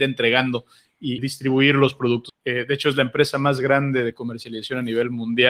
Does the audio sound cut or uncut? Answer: cut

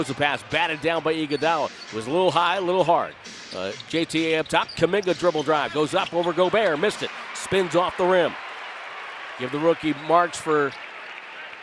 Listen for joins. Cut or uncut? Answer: uncut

